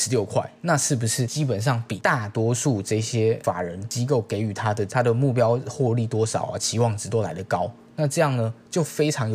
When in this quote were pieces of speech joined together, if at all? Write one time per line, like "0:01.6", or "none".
none

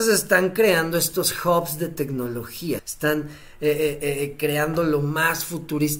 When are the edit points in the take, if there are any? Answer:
0:02.8

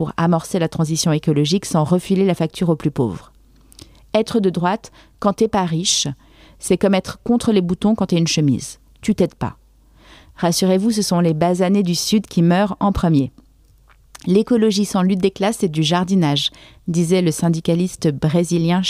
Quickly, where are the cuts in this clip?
none

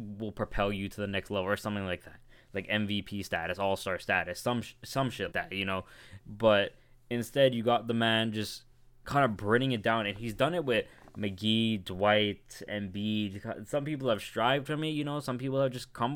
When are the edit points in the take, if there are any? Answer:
0:05.3

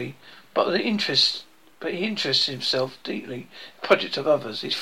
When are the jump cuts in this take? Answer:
none

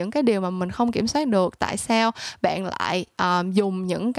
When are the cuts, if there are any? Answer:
none

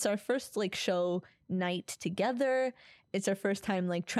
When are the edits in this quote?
none

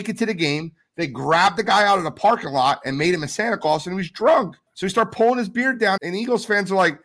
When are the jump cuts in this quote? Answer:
0:04.7
0:06.0

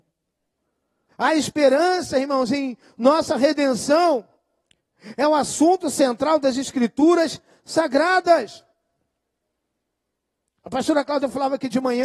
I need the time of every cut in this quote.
0:01.1

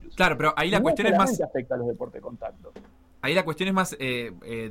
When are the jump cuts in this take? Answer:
none

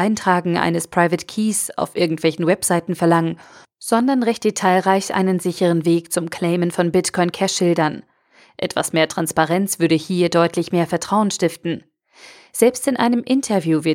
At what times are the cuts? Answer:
0:08.5

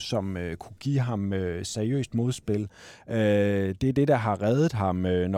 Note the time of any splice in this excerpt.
none

